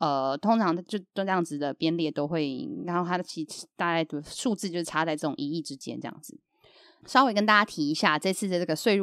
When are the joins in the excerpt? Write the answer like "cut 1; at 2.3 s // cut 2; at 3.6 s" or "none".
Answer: none